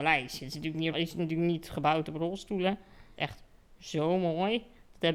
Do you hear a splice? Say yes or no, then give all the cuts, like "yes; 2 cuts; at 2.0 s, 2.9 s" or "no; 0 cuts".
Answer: yes; 2 cuts; at 0.9 s, 3.2 s